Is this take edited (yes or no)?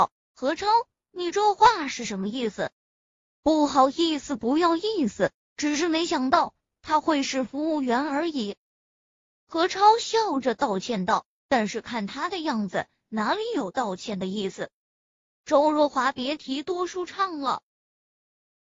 no